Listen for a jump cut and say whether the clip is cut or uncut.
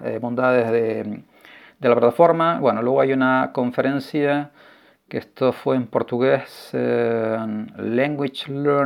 uncut